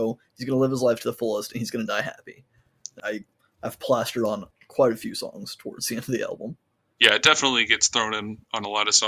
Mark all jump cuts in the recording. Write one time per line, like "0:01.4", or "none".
0:03.0